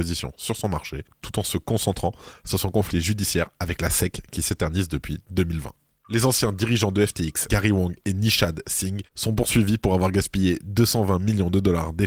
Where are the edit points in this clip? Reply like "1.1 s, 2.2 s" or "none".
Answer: 6.0 s, 7.5 s